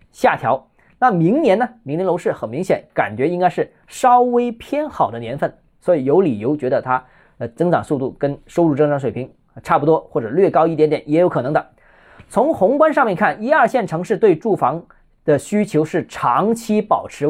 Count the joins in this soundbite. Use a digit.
0